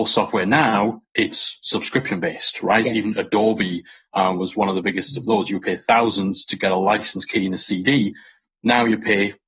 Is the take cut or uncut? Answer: uncut